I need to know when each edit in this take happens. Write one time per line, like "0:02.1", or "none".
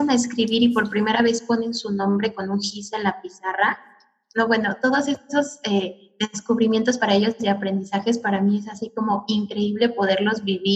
none